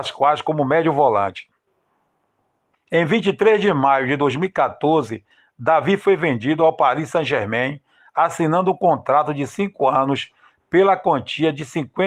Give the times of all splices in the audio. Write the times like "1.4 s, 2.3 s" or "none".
2.8 s